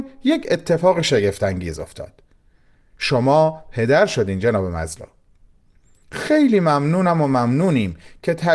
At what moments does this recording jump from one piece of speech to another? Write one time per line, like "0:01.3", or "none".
none